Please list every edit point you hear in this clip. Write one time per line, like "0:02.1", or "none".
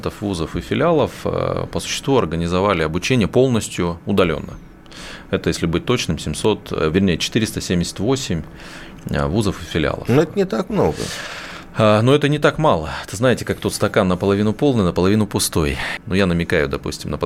0:16.0